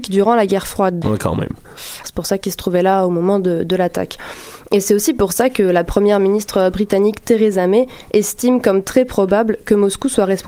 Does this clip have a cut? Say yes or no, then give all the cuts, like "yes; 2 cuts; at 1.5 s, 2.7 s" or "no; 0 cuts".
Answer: yes; 2 cuts; at 1.0 s, 2.0 s